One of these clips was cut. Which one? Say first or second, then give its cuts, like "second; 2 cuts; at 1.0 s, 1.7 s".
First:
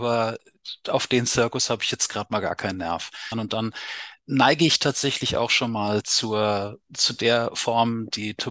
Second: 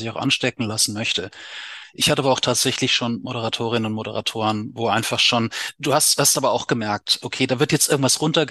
first; 2 cuts; at 3.3 s, 6.8 s